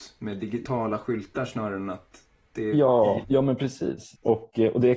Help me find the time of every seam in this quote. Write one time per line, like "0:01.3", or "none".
0:03.2